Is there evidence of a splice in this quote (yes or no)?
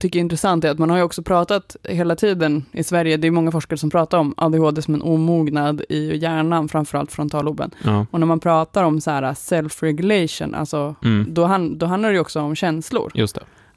no